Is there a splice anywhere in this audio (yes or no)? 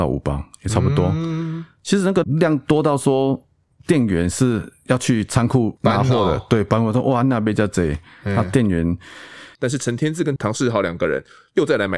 yes